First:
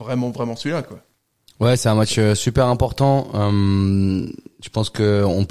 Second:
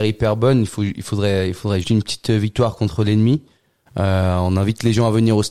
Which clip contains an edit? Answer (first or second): second